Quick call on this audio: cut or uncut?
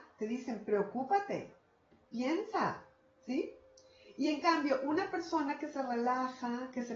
uncut